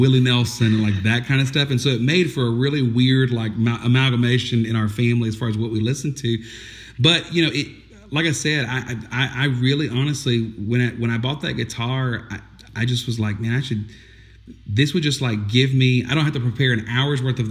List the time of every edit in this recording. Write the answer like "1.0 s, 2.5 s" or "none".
none